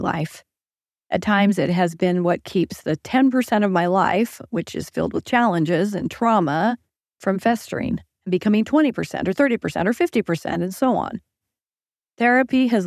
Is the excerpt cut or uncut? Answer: uncut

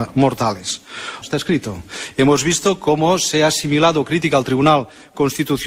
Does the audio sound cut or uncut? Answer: cut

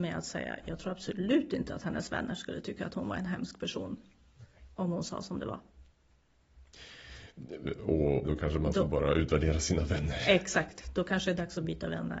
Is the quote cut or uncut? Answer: cut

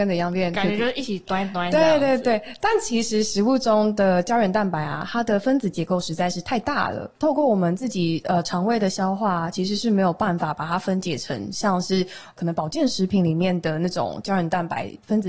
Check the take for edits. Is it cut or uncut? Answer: uncut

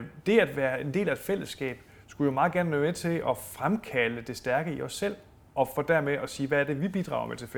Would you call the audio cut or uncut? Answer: uncut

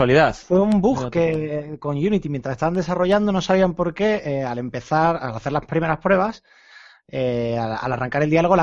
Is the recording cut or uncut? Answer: uncut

